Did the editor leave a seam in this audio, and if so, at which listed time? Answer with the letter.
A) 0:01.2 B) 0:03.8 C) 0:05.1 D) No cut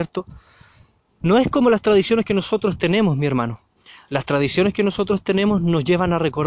A